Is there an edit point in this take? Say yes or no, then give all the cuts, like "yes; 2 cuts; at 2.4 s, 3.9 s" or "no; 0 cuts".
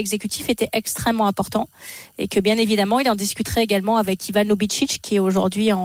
no; 0 cuts